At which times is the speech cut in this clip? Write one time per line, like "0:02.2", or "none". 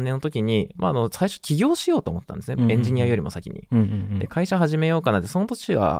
none

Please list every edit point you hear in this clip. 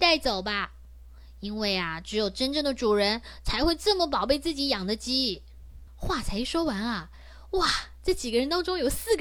0:05.9

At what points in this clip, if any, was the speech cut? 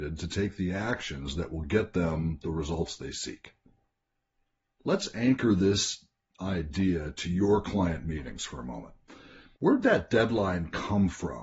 0:09.6

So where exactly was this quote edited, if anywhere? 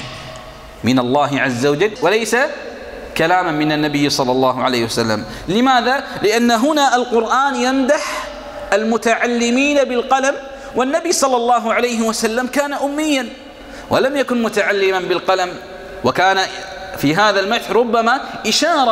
0:02.0

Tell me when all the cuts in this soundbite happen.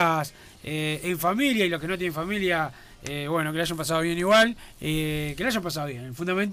none

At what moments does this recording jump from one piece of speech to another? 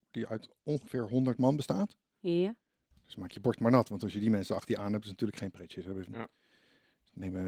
0:02.9

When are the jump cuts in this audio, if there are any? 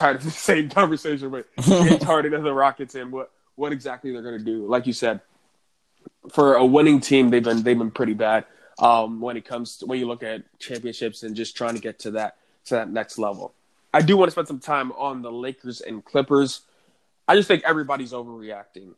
none

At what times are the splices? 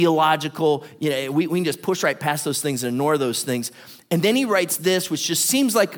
none

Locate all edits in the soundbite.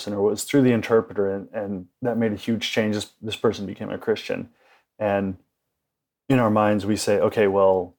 none

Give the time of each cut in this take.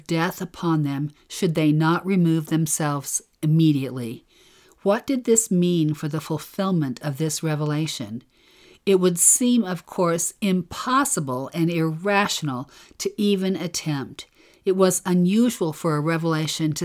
0:04.6

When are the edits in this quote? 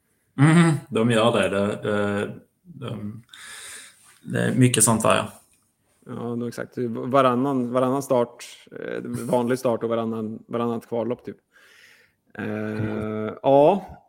none

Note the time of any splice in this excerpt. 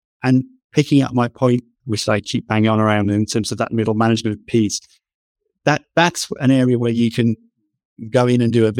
0:01.8

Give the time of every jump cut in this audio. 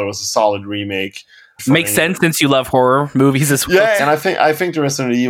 0:01.6
0:04.0

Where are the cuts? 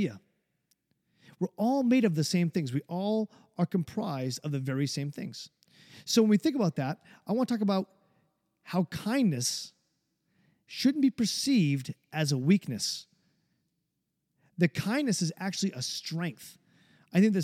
none

